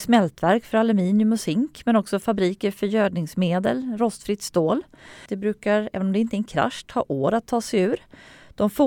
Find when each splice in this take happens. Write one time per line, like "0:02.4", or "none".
0:05.3